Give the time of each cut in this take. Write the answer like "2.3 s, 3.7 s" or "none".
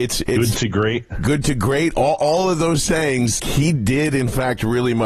3.4 s